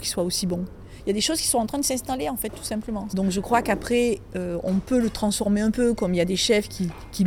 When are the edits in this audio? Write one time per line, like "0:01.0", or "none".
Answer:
0:03.1